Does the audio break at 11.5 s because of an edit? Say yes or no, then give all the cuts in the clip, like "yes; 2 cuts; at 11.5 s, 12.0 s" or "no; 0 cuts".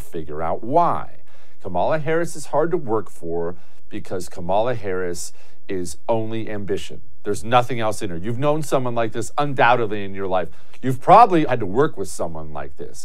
yes; 1 cut; at 11.5 s